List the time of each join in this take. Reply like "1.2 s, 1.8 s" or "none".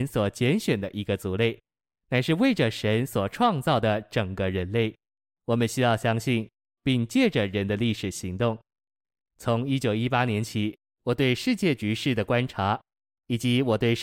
5.4 s, 6.8 s

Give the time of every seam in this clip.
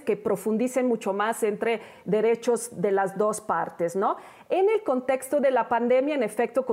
none

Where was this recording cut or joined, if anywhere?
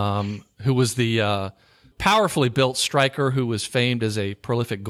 1.9 s

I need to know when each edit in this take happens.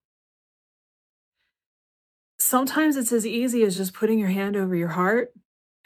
none

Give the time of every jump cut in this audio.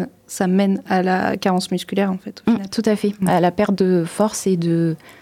none

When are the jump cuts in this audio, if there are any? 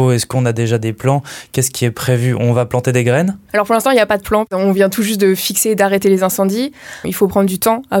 7.0 s

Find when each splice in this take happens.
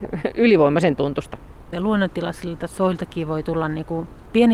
1.7 s

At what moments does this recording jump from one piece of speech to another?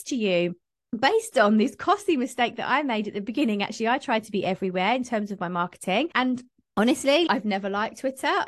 6.1 s, 7.3 s

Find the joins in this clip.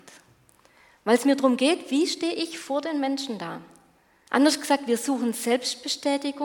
4.3 s

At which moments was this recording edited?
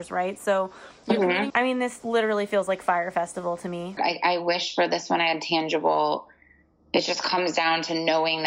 1.5 s, 4.0 s

